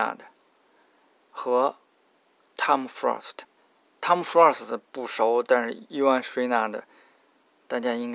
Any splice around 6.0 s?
no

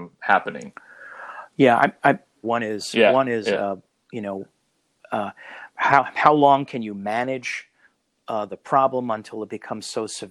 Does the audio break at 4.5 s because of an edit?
no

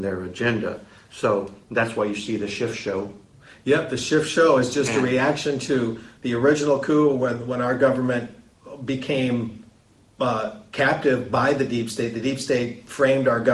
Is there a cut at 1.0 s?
no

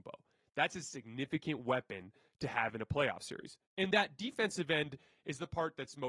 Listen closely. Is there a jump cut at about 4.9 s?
no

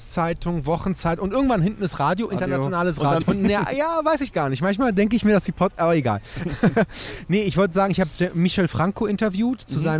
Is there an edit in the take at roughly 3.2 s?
yes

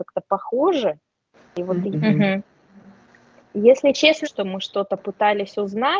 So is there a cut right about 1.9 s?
yes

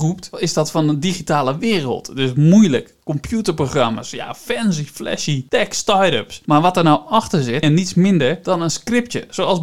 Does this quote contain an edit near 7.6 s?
yes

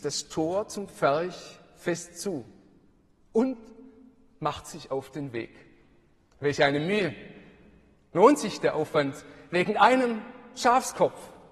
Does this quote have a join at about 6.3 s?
yes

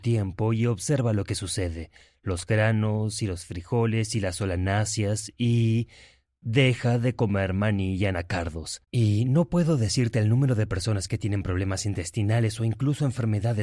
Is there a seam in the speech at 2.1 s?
no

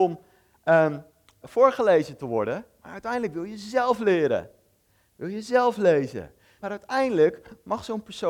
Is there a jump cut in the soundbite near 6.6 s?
yes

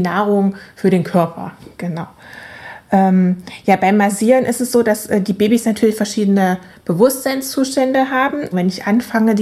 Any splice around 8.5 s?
yes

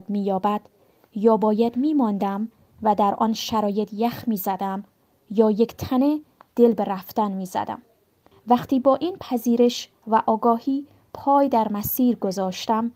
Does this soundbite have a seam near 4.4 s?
no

